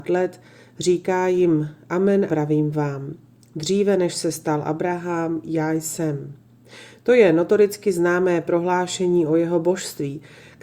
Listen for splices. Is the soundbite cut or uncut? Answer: cut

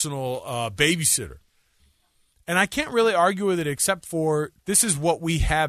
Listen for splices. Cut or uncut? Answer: uncut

